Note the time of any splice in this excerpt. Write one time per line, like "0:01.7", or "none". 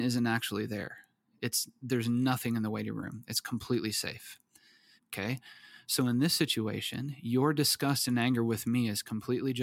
0:05.0